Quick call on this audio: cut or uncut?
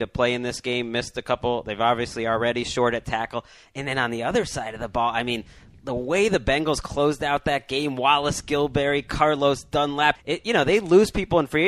cut